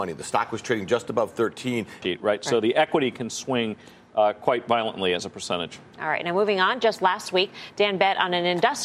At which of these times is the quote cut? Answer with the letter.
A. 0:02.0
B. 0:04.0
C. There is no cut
A